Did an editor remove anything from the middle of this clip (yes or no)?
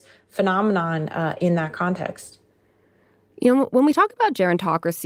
no